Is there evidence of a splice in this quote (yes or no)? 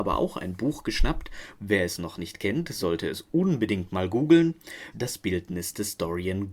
yes